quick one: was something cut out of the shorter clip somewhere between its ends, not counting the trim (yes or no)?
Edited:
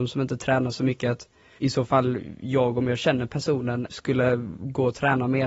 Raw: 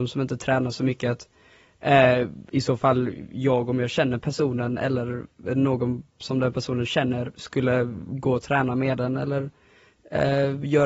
yes